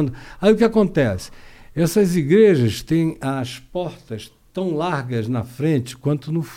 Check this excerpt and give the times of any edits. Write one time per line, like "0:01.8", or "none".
none